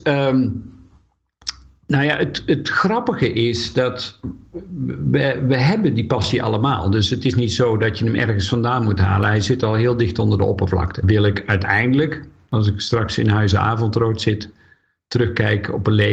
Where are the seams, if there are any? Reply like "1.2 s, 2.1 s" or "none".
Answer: 11.0 s

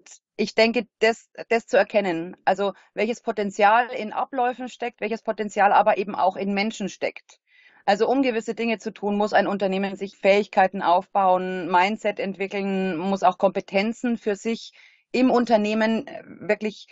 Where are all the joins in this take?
7.7 s, 10.1 s

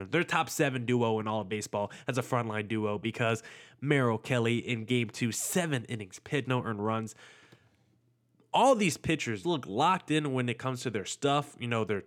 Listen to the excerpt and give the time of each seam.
6.4 s, 9.4 s

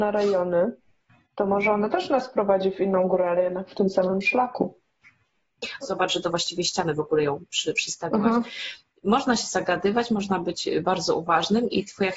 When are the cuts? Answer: 5.8 s

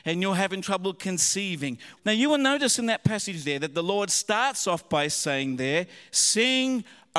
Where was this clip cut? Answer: 2.0 s

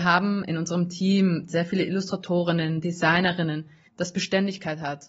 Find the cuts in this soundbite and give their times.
3.9 s

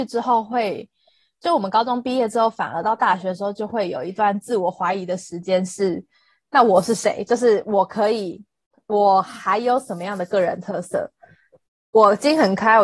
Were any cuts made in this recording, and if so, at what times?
none

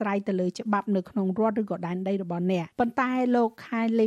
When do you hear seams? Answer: 2.7 s

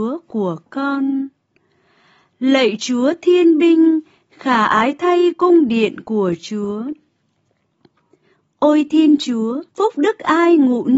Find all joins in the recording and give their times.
9.7 s

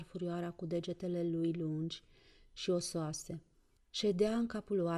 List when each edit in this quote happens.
3.8 s

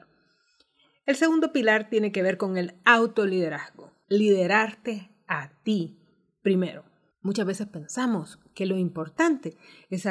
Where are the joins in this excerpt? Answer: 4.0 s, 7.1 s

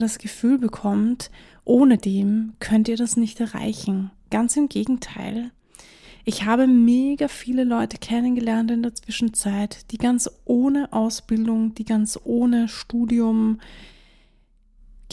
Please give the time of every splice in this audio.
none

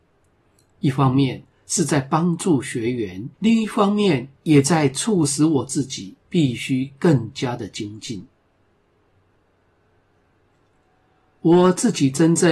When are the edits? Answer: 3.3 s

